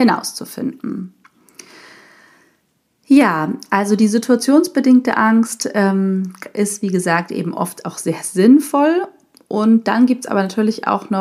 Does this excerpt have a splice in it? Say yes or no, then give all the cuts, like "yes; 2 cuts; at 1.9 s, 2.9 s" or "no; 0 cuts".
no; 0 cuts